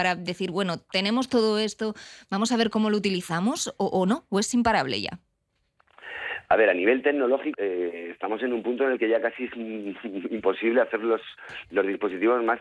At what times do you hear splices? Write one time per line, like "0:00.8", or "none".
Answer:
0:07.5